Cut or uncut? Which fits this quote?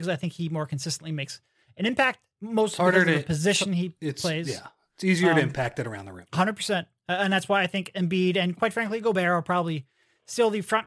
uncut